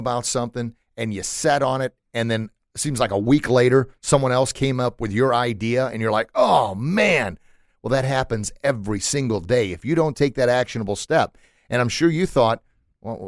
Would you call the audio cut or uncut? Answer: uncut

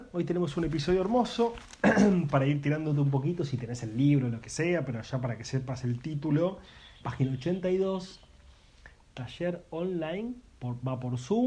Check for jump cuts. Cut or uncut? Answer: cut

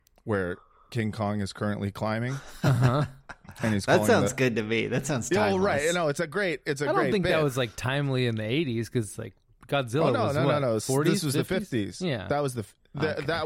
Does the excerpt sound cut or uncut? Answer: uncut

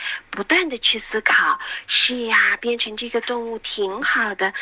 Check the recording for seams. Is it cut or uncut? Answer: uncut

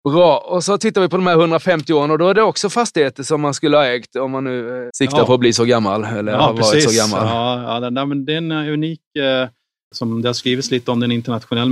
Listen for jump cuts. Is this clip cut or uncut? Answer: cut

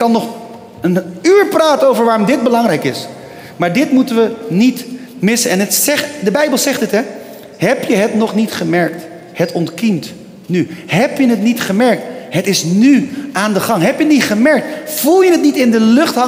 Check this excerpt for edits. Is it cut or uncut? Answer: uncut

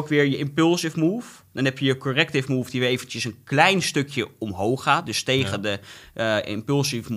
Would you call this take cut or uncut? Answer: uncut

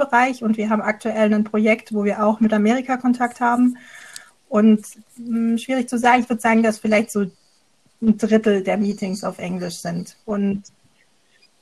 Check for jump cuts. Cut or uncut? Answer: cut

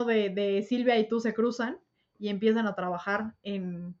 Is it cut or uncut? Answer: uncut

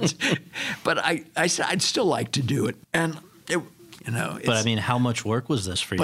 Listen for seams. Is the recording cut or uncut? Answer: cut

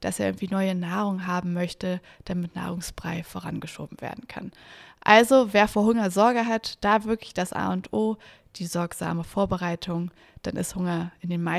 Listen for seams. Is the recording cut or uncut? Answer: uncut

